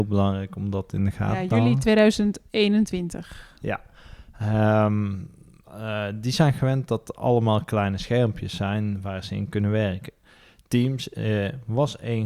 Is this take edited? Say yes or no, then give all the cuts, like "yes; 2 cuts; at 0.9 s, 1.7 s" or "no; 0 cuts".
no; 0 cuts